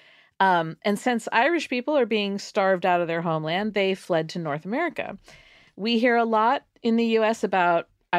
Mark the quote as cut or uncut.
uncut